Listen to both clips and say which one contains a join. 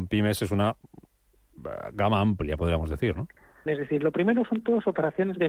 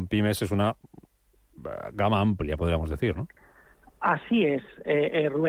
first; 1 cut; at 3.7 s

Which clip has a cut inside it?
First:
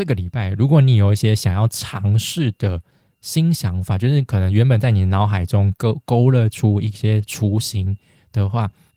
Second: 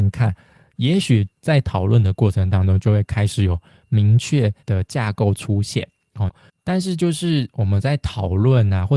second; 2 cuts; at 4.6 s, 6.3 s

